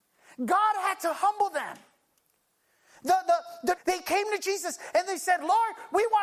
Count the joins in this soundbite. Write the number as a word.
one